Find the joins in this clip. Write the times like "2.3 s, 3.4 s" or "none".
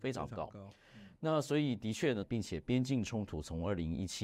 1.2 s, 2.2 s